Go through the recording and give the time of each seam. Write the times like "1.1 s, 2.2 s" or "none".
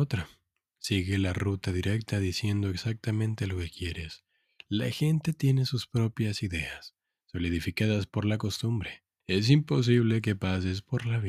4.6 s, 9.2 s